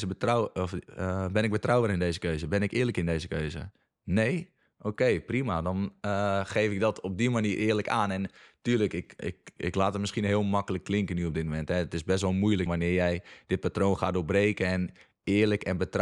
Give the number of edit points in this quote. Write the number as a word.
one